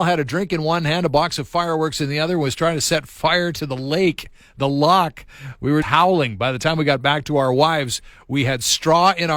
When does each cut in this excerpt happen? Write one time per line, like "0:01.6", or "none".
0:05.8

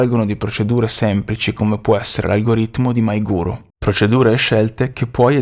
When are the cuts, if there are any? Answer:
0:03.7

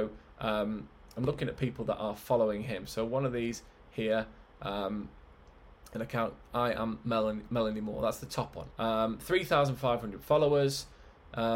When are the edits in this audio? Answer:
0:08.7

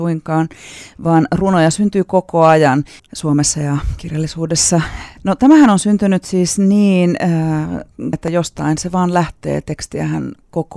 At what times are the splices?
0:03.0
0:05.2
0:08.1

